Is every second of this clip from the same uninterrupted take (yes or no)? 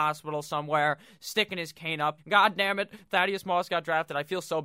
no